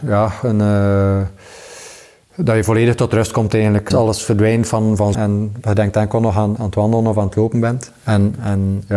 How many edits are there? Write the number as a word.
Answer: three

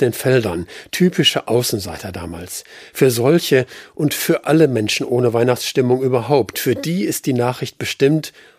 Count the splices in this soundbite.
zero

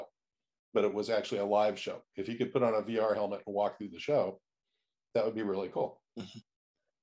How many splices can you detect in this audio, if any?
one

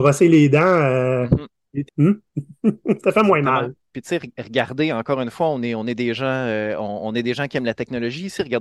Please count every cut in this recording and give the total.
one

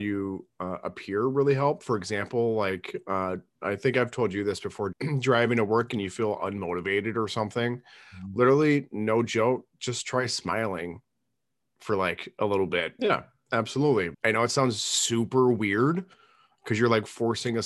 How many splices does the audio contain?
three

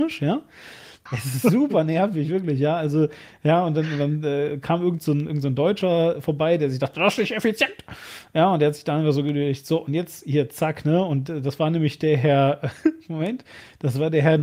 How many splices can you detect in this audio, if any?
one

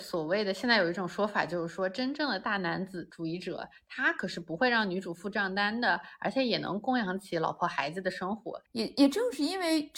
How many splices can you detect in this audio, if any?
one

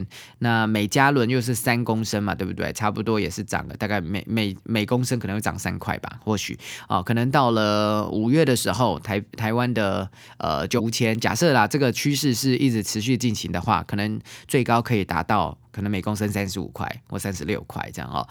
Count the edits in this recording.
one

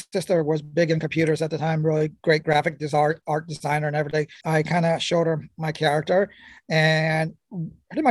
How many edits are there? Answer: one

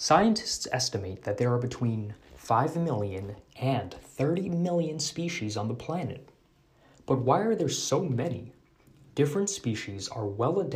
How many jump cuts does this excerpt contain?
zero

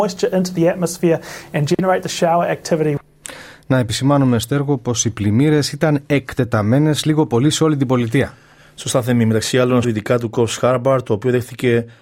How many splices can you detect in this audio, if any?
one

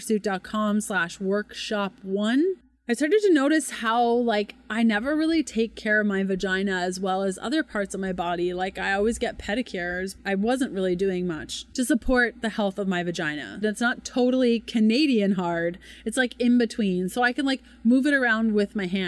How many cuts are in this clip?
two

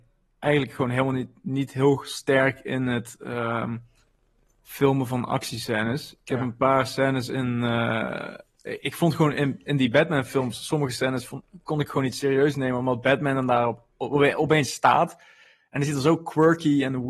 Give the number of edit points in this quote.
zero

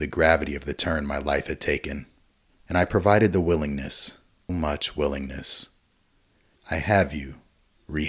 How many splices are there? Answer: two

